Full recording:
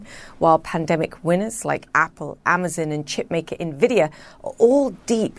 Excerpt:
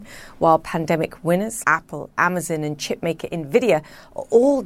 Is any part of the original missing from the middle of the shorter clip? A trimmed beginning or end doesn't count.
yes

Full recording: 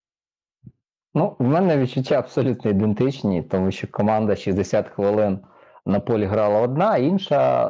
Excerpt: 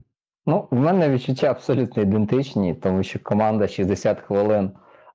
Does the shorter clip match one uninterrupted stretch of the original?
yes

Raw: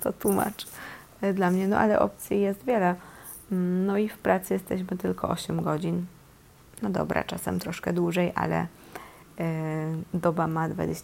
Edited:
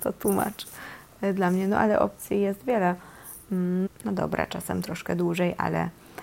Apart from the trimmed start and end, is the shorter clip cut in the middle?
yes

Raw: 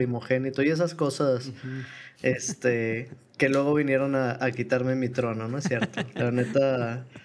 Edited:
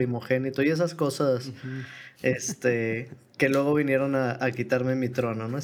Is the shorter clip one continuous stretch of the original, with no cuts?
yes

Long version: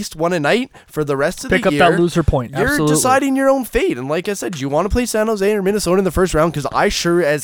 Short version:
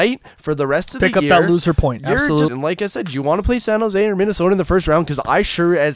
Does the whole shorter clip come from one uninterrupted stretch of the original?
no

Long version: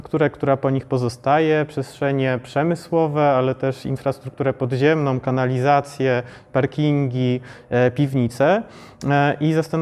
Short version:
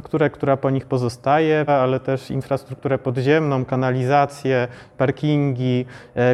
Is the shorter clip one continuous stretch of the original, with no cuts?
no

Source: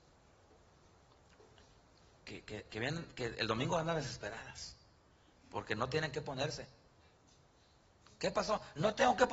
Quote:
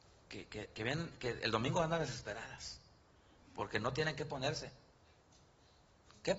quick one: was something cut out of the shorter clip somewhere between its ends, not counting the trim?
no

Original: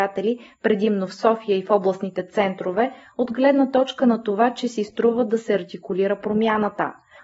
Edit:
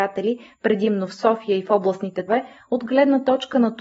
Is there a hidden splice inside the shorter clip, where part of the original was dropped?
yes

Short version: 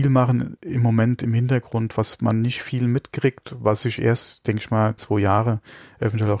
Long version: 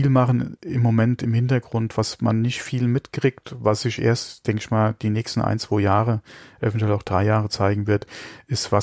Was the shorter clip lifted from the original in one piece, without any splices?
no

